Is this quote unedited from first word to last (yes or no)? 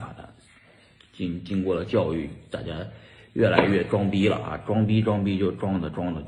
yes